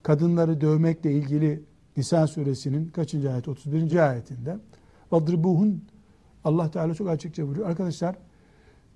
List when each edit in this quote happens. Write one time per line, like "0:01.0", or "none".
0:03.9